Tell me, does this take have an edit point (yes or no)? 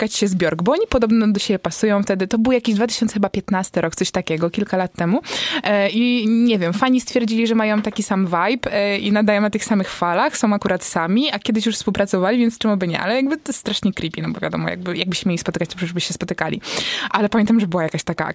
no